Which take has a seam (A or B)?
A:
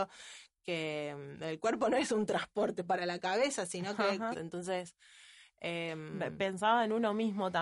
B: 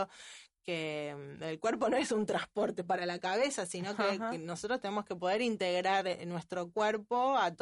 A